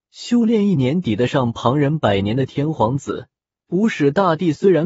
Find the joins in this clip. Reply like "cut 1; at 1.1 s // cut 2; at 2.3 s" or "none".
cut 1; at 3.5 s